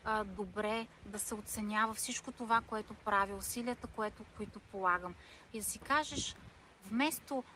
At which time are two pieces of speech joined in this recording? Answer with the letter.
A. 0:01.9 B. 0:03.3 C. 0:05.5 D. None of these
C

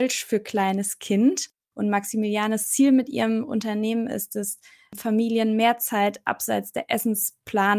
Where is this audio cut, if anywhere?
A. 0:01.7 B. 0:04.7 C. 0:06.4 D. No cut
A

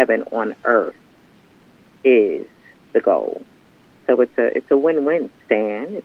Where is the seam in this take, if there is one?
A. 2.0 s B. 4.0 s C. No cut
B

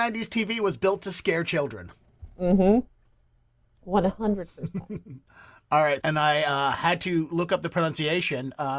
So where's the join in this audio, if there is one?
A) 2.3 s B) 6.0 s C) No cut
B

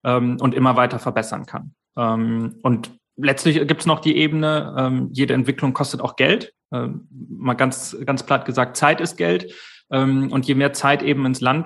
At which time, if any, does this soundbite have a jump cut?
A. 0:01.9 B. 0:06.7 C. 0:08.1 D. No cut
D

